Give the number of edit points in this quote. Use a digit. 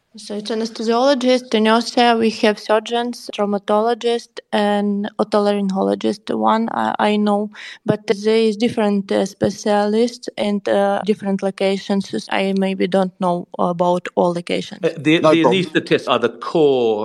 1